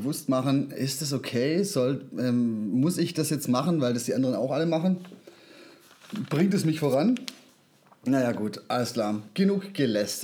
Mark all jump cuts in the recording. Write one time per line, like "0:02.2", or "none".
none